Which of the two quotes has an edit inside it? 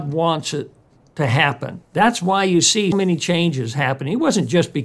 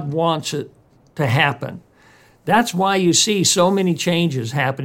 first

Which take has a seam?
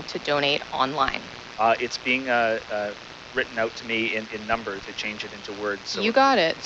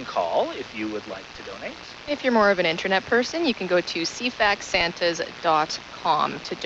first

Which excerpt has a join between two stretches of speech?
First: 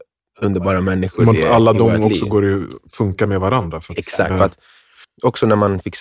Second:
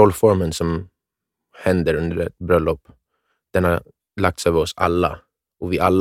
first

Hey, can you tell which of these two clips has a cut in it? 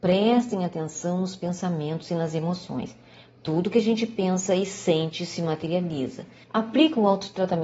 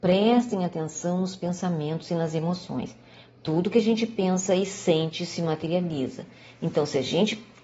first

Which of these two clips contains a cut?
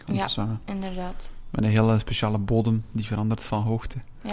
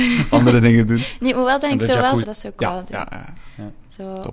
second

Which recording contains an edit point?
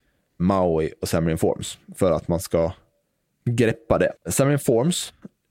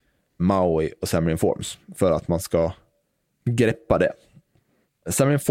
first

